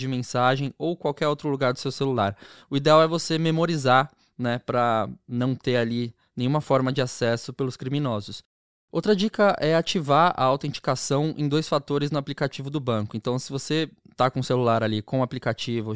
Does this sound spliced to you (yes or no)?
no